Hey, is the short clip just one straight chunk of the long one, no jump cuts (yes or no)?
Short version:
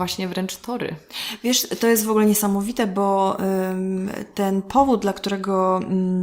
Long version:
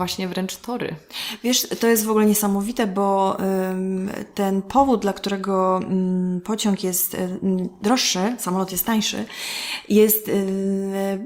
yes